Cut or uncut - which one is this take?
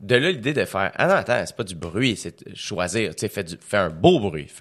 uncut